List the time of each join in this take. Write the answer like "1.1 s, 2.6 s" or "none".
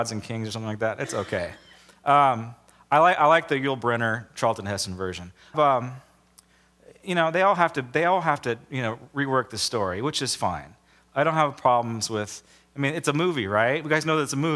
5.5 s